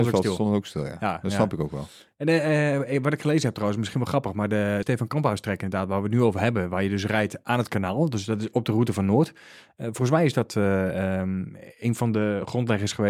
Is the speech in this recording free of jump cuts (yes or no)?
no